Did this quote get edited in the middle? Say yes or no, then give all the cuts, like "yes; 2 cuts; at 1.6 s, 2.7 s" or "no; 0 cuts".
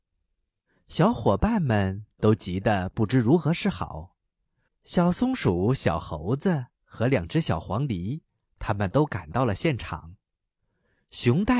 yes; 1 cut; at 4.7 s